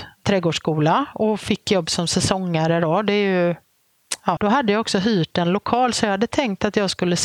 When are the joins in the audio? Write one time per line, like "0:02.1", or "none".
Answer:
0:04.4